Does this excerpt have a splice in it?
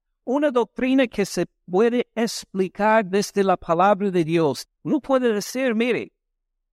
yes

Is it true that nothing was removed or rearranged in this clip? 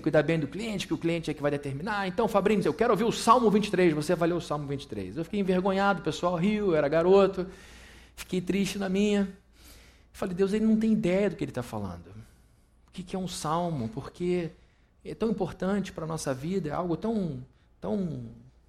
no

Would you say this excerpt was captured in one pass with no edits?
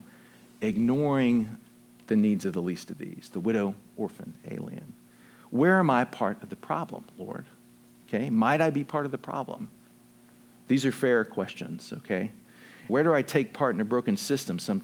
no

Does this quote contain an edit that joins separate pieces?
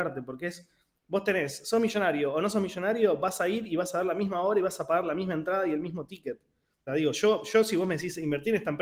yes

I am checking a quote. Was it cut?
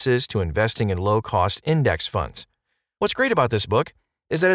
no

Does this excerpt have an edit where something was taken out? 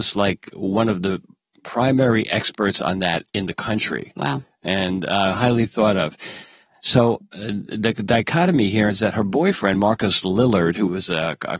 no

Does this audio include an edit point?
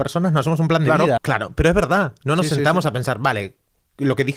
yes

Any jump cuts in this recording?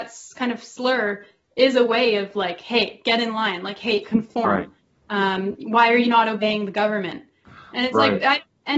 no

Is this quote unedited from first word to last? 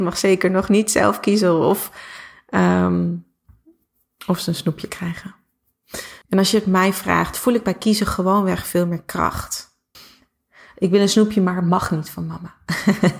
no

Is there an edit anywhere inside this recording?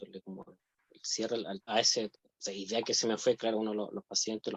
yes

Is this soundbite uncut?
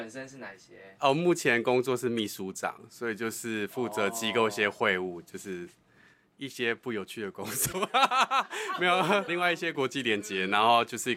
no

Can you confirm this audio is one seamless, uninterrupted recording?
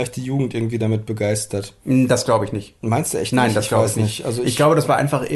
yes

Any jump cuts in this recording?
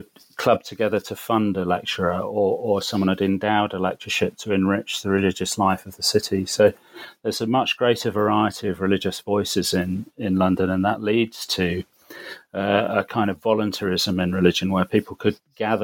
no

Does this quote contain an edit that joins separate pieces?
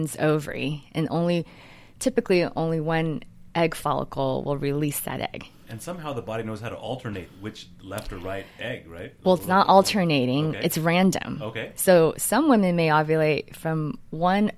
yes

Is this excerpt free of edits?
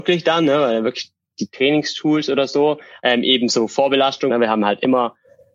no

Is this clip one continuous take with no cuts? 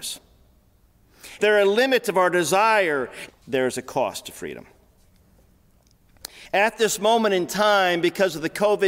no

